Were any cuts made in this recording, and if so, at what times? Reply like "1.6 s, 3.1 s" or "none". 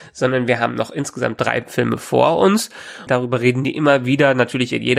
3.1 s